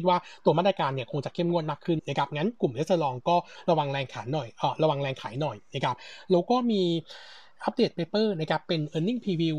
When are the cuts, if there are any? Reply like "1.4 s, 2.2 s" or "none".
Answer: 2.0 s